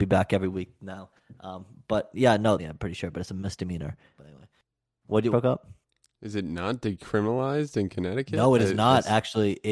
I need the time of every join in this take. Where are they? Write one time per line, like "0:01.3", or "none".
0:02.6
0:04.2
0:05.3